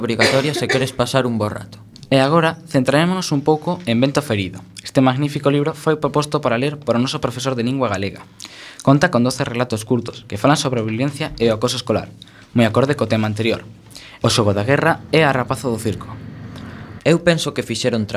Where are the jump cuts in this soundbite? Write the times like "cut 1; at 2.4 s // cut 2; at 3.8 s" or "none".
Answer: cut 1; at 14.2 s // cut 2; at 17.0 s